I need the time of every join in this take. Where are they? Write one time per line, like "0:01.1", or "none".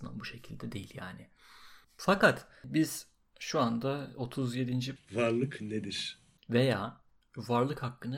0:01.8
0:05.0
0:06.4